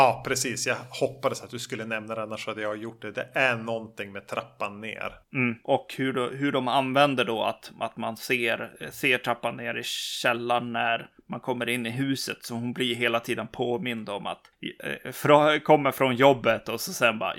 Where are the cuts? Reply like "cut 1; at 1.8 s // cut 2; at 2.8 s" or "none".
none